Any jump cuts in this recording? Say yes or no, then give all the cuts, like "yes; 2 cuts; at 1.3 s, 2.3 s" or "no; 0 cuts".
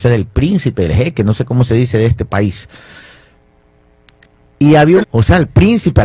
yes; 1 cut; at 5.0 s